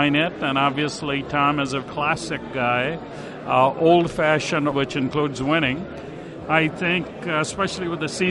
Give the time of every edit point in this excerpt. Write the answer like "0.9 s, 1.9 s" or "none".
1.8 s, 4.7 s, 6.4 s